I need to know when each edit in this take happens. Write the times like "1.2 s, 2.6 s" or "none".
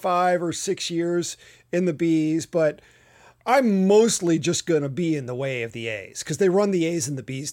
none

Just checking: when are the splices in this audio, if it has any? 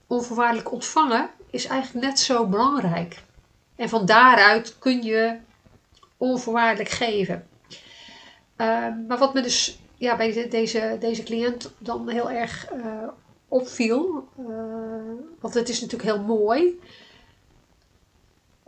3.8 s

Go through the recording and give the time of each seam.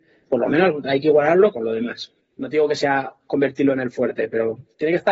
1.5 s

